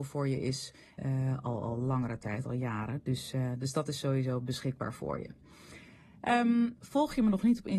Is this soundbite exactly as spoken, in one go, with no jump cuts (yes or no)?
no